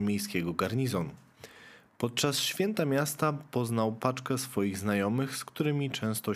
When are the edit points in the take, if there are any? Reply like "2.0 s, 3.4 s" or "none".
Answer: none